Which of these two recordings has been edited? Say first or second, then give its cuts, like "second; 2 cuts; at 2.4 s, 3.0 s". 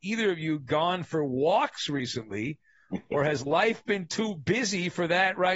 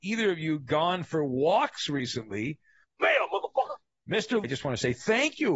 second; 2 cuts; at 2.8 s, 4.4 s